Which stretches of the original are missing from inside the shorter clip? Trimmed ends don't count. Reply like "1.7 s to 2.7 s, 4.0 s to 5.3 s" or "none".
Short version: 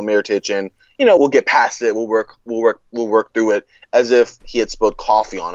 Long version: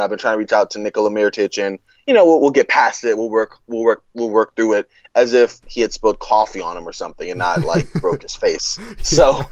2.3 s to 2.4 s